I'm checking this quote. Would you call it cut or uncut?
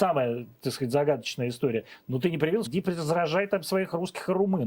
cut